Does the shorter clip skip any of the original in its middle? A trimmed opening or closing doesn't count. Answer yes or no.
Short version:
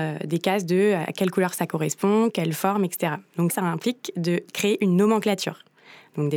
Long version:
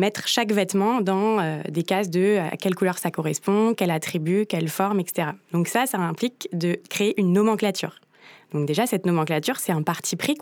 yes